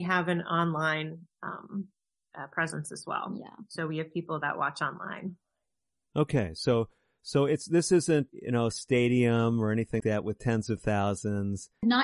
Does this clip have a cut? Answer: yes; 2 cuts; at 8.3 s, 10.0 s

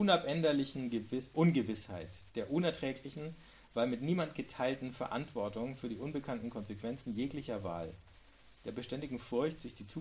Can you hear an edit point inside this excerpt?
no; 0 cuts

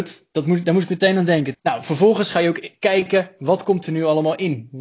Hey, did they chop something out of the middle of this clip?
yes; 1 cut; at 1.5 s

